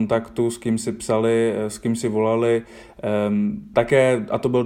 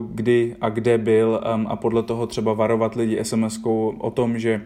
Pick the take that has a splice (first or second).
first